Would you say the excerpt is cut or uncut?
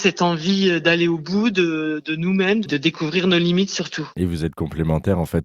cut